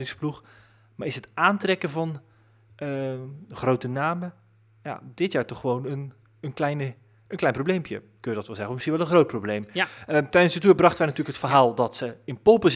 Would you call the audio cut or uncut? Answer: uncut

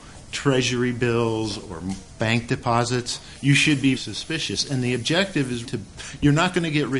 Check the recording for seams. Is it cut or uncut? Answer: cut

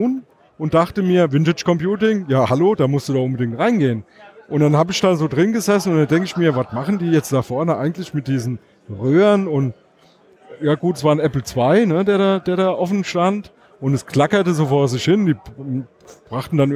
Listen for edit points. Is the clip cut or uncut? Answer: uncut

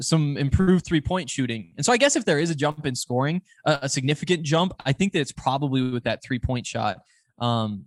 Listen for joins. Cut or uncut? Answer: uncut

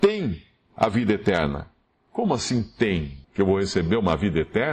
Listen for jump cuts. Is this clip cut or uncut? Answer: cut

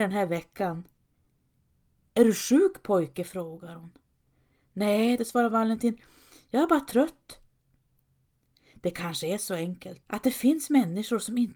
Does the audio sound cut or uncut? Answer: cut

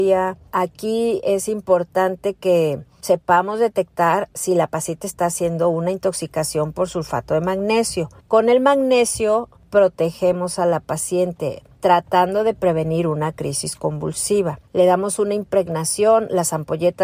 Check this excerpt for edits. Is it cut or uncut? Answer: cut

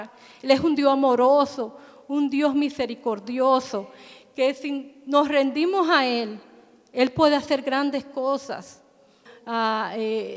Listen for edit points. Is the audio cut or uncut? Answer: cut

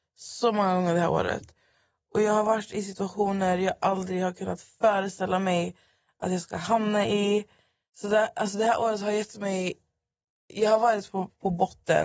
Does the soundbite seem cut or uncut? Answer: uncut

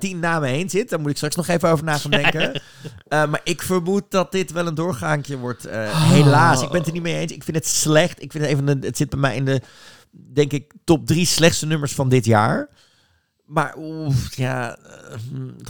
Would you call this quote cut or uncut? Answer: uncut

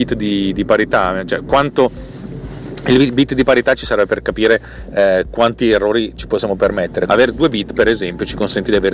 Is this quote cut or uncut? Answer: cut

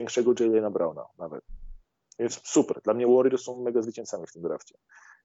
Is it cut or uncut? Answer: uncut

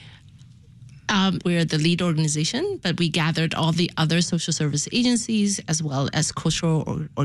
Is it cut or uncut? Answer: cut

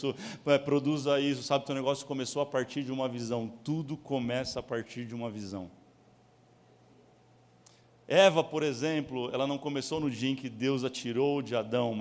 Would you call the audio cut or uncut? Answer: uncut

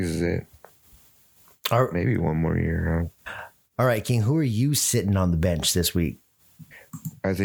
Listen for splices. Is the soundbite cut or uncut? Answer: uncut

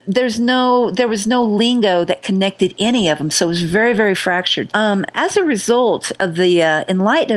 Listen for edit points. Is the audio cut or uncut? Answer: cut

